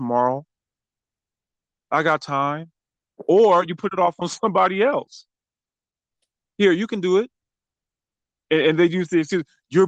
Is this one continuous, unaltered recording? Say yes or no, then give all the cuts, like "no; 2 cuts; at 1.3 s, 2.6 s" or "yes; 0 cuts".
yes; 0 cuts